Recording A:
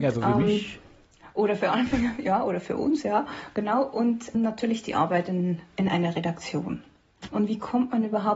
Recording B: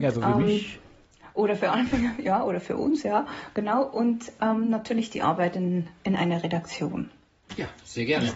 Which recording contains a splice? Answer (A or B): A